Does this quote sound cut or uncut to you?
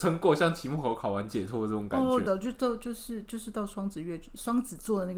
cut